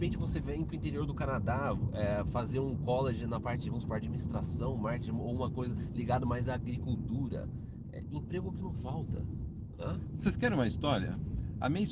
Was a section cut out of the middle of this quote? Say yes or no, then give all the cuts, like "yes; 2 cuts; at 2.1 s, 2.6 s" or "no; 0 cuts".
no; 0 cuts